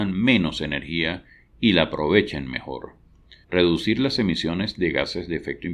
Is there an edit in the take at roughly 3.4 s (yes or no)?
yes